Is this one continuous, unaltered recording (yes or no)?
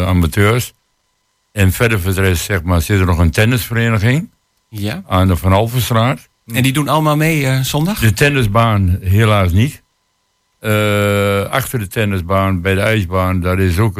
yes